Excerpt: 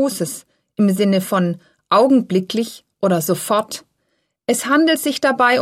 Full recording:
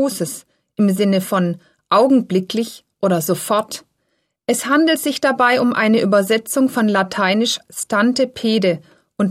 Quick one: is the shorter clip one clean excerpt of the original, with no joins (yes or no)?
yes